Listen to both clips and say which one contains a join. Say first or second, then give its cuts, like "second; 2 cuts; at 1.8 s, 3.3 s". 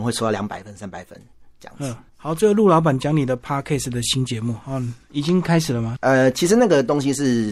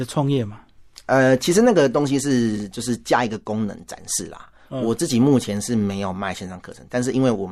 first; 2 cuts; at 2.1 s, 6.0 s